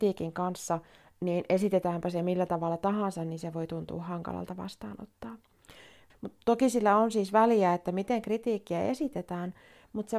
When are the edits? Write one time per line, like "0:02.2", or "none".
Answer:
0:06.1